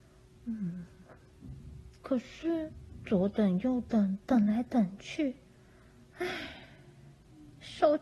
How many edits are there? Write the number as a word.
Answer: one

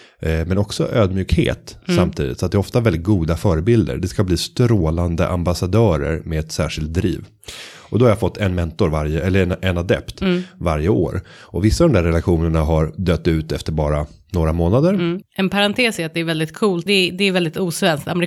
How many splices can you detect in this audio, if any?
two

